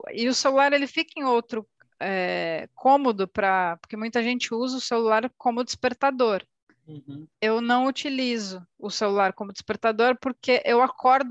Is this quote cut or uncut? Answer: uncut